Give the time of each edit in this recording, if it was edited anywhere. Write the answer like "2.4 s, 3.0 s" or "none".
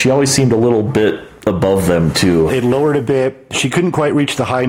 2.5 s